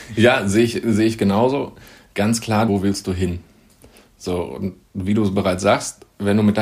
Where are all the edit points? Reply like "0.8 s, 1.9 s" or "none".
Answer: 2.7 s